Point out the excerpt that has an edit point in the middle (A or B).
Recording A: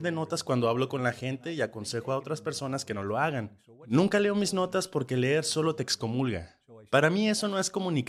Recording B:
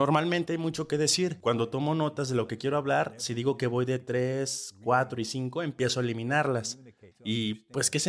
B